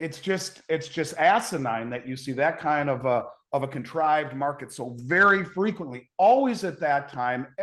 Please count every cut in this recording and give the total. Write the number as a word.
zero